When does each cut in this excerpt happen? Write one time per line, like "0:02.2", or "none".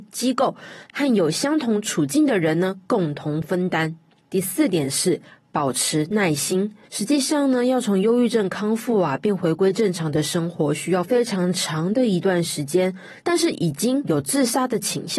0:13.2